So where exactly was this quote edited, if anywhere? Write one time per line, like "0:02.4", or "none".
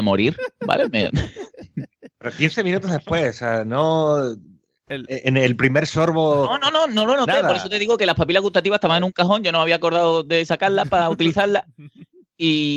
none